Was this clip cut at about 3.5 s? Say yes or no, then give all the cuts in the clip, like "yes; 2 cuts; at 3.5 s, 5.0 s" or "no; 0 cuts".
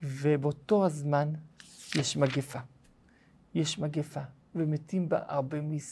no; 0 cuts